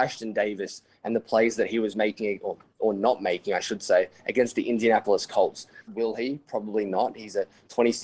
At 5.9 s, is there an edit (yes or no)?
yes